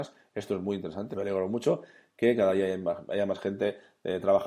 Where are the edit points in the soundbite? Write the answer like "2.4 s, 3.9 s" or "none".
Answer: 1.1 s